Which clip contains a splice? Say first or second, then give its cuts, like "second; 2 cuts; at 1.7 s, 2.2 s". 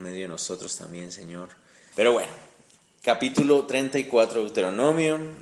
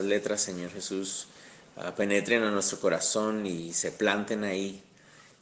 first; 1 cut; at 1.9 s